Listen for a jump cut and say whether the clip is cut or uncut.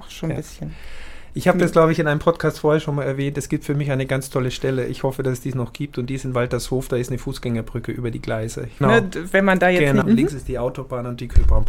cut